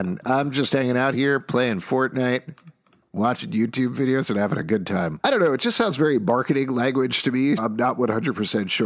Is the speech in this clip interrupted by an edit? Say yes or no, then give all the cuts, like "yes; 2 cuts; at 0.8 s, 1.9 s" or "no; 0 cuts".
yes; 2 cuts; at 5.2 s, 7.6 s